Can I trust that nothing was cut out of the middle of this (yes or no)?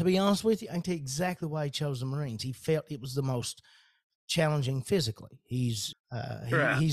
no